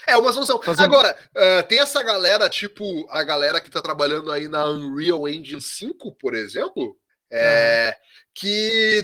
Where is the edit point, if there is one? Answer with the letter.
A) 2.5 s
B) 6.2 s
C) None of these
C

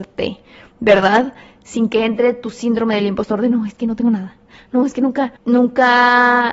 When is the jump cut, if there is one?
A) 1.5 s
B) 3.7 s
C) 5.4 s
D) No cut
C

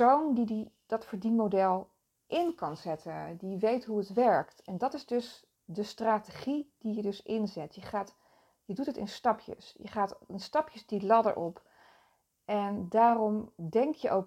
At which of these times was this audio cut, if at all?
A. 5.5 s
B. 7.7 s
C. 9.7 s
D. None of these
A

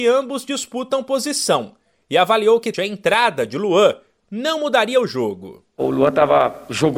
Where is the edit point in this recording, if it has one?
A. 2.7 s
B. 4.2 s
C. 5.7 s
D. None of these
A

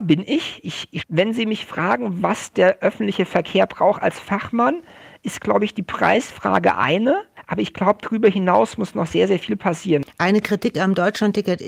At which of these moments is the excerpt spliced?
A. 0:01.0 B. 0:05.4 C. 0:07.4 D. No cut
A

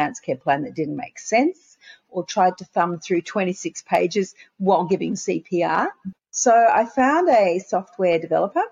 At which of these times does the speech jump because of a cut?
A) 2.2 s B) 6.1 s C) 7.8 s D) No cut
B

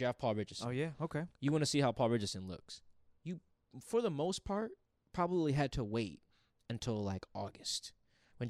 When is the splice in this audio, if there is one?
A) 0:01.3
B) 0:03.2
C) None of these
A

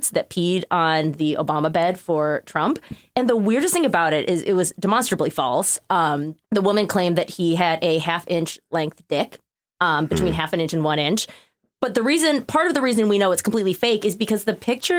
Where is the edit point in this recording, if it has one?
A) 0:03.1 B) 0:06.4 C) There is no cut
B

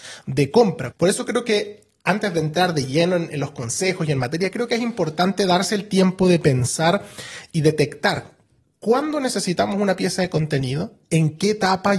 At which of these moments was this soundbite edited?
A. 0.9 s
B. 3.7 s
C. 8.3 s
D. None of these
A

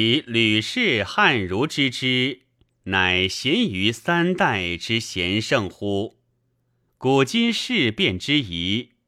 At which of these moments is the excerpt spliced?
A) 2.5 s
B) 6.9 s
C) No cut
B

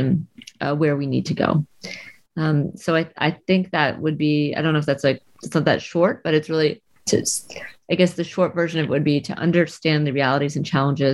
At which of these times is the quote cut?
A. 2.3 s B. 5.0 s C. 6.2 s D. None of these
D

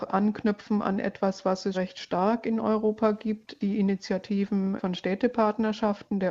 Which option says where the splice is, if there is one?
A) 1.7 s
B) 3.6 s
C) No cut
A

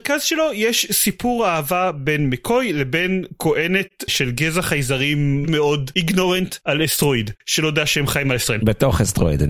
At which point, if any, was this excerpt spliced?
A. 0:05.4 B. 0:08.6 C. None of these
A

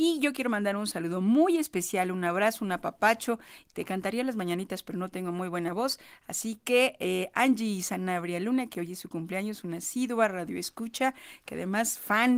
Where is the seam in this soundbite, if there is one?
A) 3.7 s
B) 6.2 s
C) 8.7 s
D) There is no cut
D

